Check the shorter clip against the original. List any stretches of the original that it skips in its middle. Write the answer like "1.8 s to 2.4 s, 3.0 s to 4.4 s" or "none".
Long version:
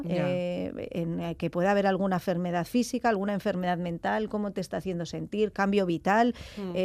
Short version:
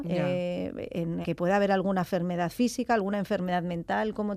1.2 s to 1.4 s